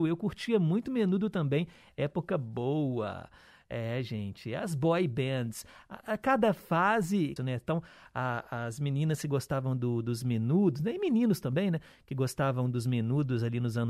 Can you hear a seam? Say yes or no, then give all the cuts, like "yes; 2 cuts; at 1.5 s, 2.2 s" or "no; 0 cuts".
yes; 1 cut; at 7.4 s